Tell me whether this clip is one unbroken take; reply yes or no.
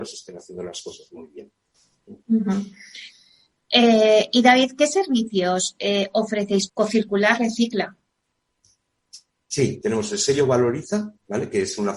no